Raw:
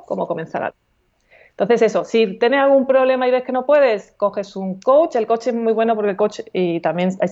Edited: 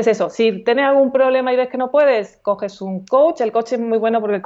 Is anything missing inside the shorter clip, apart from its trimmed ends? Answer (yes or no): no